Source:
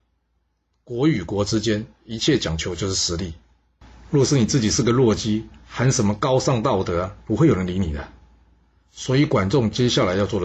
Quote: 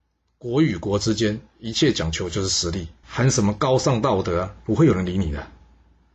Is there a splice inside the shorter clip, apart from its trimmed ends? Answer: yes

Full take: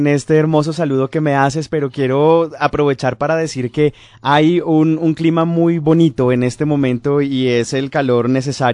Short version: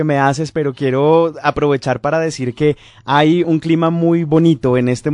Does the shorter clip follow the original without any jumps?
no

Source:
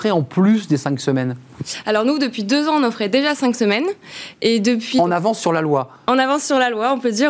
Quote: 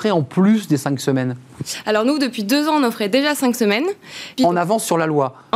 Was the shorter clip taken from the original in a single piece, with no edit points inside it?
no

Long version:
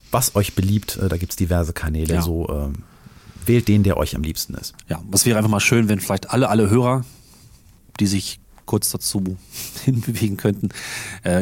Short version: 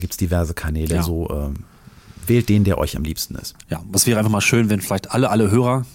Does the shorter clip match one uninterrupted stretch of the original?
yes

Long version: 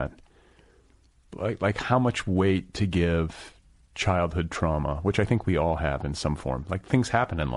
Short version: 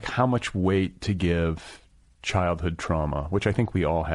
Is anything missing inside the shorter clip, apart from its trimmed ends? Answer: no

